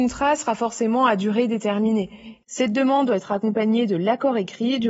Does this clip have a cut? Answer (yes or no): yes